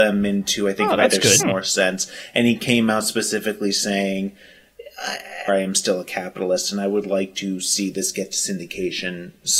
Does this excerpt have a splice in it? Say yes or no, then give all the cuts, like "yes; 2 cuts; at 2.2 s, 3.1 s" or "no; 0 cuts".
yes; 2 cuts; at 1.4 s, 5.5 s